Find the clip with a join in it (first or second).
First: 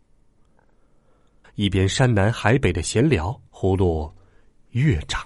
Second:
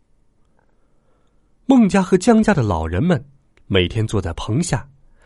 first